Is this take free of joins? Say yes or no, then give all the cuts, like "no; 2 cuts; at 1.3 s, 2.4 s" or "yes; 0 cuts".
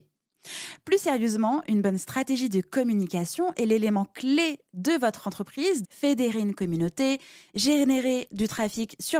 no; 1 cut; at 5.8 s